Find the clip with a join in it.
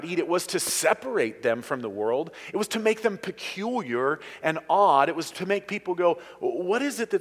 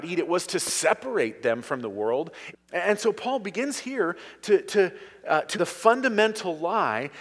second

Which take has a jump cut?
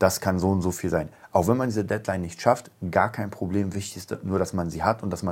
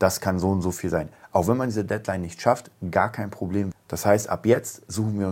second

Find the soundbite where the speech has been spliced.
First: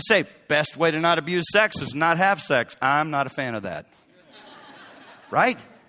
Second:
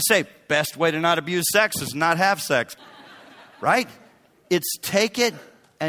second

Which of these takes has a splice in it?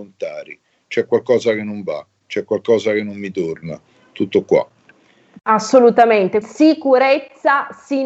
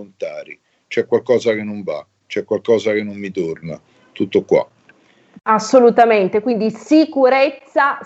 first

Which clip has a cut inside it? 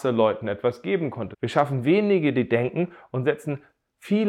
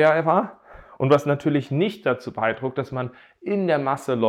first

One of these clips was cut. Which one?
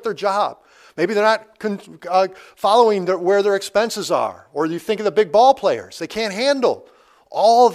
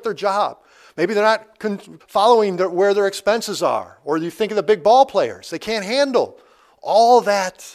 second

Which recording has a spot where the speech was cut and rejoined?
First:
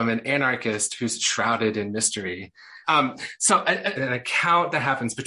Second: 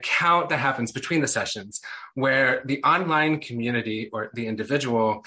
first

